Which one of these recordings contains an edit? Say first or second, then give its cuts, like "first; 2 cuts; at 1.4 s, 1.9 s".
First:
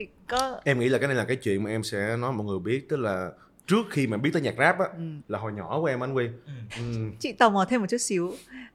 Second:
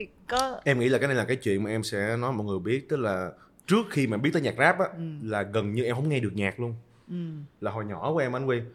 first; 2 cuts; at 5.2 s, 6.7 s